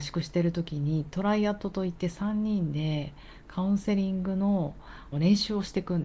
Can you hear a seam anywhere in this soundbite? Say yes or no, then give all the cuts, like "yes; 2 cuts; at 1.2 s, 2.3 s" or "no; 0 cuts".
yes; 1 cut; at 5.1 s